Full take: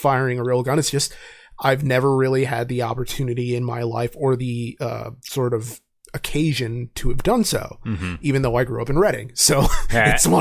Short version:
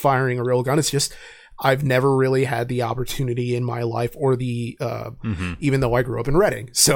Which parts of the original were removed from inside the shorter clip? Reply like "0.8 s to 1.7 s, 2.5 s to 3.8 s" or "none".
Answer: 5.2 s to 7.8 s